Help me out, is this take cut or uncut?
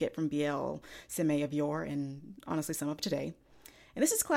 uncut